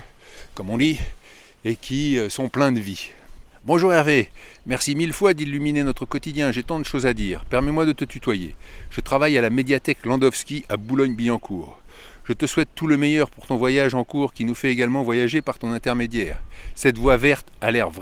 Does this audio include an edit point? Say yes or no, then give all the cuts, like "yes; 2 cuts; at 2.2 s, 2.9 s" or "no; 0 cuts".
no; 0 cuts